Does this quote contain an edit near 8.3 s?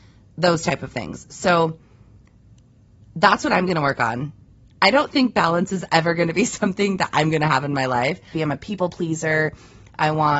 yes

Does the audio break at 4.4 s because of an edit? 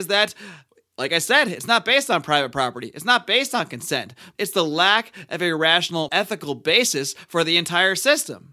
yes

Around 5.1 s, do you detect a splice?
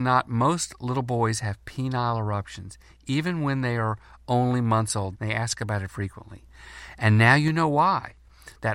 yes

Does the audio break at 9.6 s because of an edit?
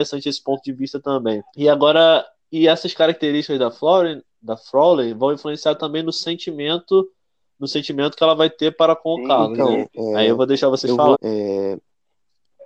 no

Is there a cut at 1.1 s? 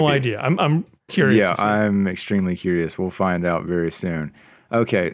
yes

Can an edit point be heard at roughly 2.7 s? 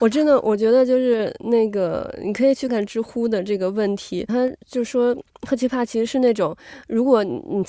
yes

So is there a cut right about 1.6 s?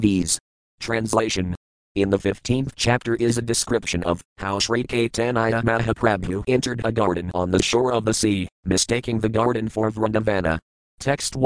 no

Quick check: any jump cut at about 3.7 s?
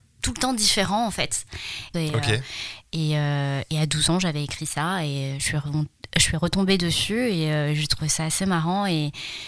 no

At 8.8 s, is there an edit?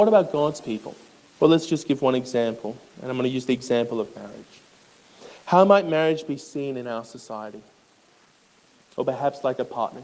no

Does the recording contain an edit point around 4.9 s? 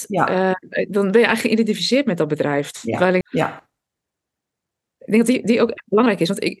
no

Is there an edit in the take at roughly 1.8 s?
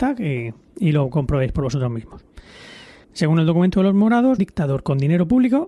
no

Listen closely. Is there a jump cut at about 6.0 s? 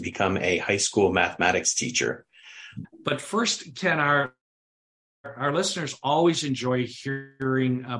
no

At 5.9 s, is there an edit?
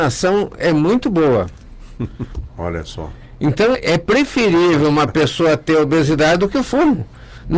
no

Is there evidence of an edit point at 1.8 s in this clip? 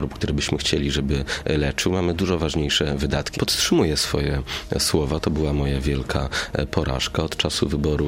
no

